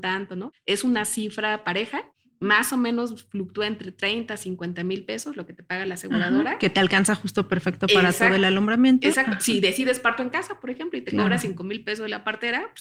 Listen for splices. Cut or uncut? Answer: uncut